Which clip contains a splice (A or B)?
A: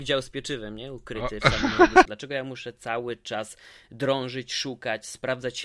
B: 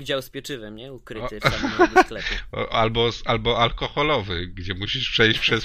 A